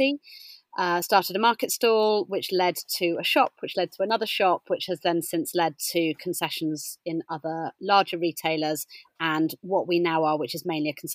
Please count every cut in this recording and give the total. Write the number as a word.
zero